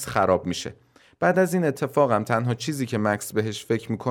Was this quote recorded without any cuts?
yes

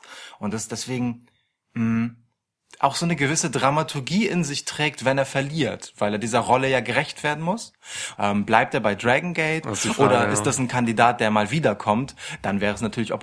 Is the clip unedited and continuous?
no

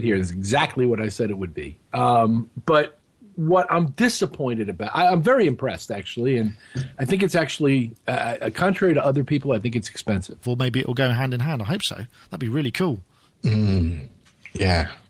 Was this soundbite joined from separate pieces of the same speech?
yes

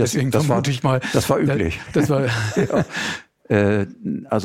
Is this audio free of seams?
yes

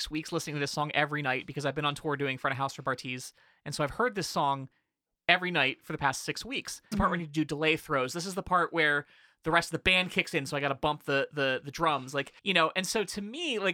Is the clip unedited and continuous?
no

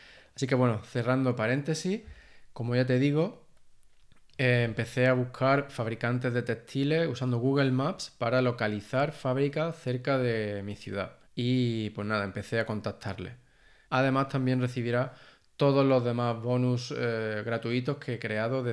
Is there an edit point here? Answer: yes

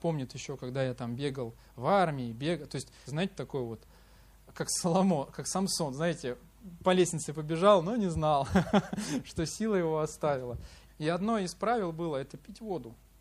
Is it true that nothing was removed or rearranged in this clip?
no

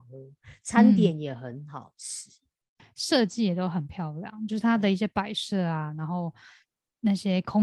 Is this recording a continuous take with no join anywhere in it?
no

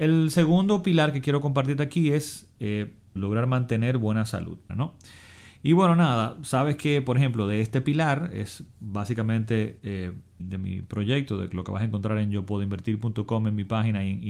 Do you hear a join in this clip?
yes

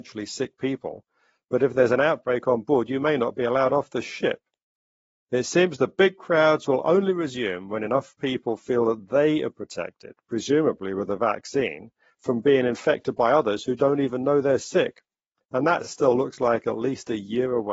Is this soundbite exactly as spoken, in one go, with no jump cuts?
yes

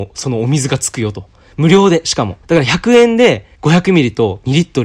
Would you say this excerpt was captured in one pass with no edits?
no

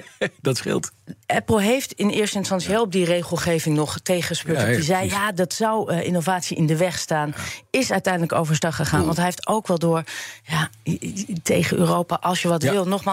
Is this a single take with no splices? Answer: yes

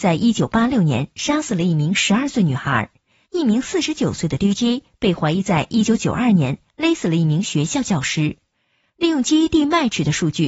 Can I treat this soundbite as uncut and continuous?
yes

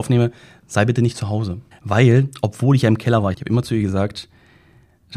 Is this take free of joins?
no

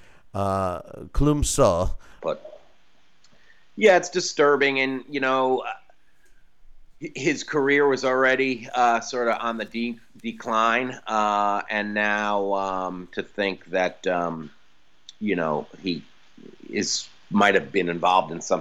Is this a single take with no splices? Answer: no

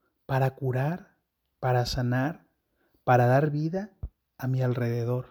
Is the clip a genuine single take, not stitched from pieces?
yes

